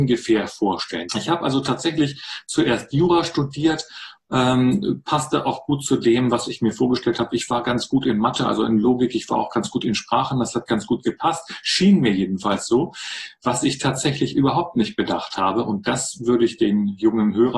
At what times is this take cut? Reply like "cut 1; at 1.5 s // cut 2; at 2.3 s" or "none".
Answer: cut 1; at 1.1 s